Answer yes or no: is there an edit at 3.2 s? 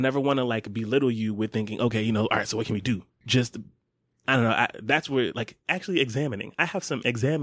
yes